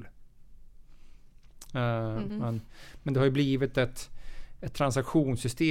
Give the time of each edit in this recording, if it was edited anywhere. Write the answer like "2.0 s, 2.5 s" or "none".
2.3 s